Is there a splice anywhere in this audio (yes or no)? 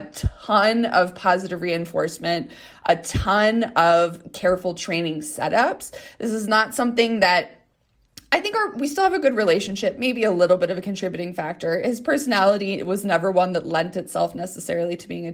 no